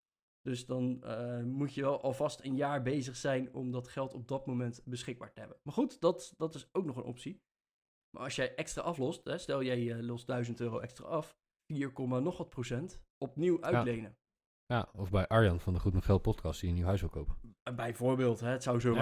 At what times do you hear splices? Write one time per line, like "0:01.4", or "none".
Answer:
0:08.0
0:11.6